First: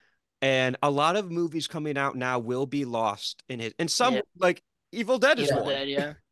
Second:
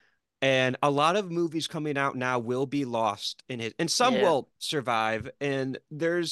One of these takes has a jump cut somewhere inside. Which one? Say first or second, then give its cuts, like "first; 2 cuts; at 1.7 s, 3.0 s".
first; 1 cut; at 4.2 s